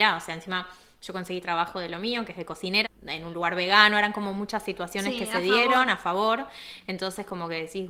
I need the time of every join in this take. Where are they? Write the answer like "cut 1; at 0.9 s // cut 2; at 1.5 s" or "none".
cut 1; at 2.8 s